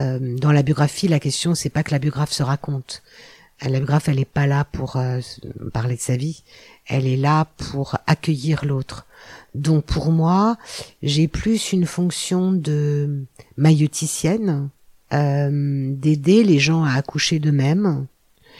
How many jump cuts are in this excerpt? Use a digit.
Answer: 0